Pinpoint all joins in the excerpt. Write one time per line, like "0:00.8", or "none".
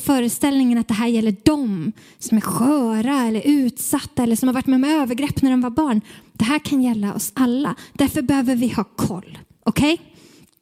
none